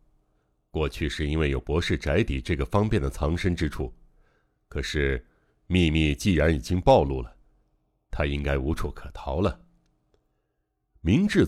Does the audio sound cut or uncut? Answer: uncut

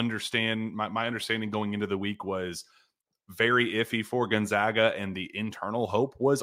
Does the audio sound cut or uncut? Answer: uncut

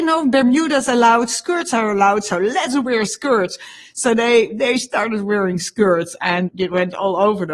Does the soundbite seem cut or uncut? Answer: cut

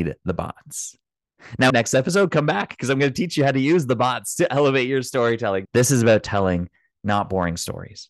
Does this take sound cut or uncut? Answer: cut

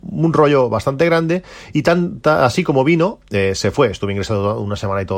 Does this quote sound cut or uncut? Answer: uncut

